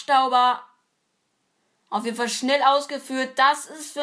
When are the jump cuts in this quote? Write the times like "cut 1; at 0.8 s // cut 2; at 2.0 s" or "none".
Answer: cut 1; at 1.8 s